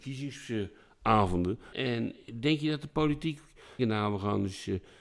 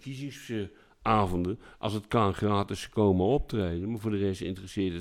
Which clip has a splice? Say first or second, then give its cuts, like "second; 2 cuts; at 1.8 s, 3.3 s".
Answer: first; 2 cuts; at 1.7 s, 3.8 s